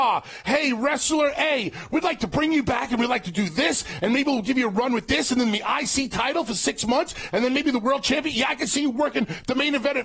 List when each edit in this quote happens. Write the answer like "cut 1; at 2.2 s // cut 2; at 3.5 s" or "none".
none

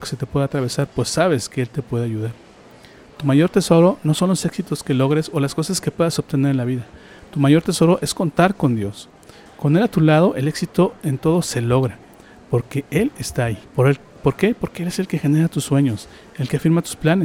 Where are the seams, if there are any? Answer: cut 1; at 13.6 s

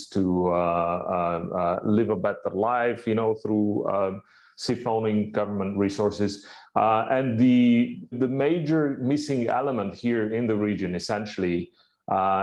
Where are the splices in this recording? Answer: cut 1; at 6.6 s // cut 2; at 8.1 s

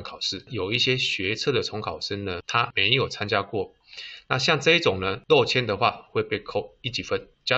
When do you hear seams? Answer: none

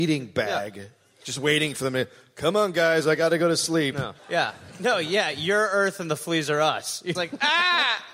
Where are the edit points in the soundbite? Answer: cut 1; at 4.2 s // cut 2; at 7.1 s

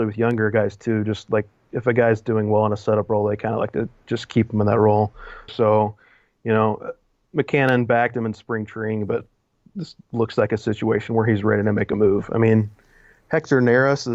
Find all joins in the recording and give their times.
cut 1; at 5.5 s

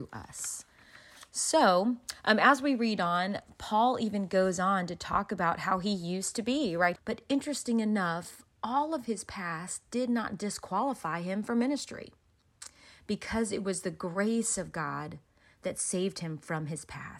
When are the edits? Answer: cut 1; at 7.0 s

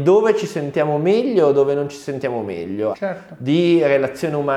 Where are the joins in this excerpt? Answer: cut 1; at 2.9 s

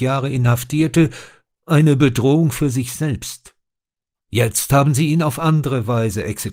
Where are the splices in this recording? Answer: cut 1; at 4.2 s

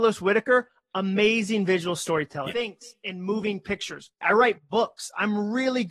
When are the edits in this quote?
cut 1; at 2.5 s // cut 2; at 4.2 s

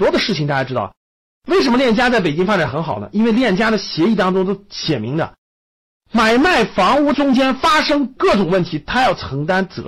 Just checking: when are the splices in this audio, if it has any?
none

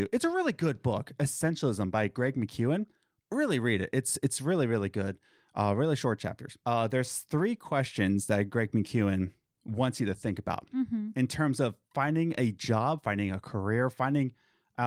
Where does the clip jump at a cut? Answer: cut 1; at 6.6 s

